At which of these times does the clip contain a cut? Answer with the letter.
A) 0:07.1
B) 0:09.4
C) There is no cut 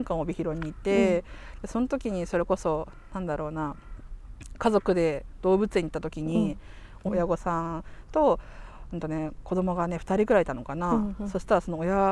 A